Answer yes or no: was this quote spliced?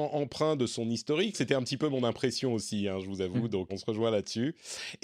yes